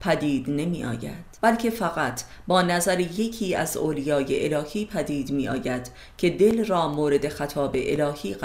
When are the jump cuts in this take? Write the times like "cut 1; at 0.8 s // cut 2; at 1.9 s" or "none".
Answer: cut 1; at 1.4 s